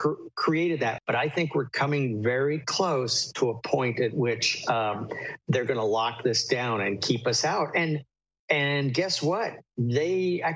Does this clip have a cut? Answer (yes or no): yes